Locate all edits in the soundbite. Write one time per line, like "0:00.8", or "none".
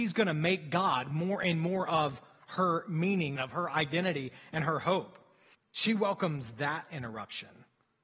0:03.4
0:05.5